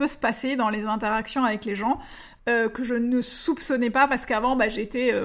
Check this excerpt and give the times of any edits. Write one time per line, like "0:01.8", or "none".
0:02.4